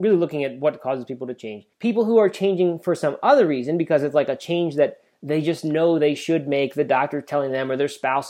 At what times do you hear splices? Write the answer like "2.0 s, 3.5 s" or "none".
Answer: 1.7 s

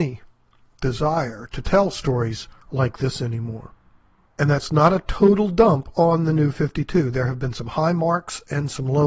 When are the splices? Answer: none

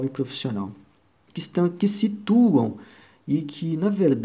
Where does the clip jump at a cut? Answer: 1.3 s

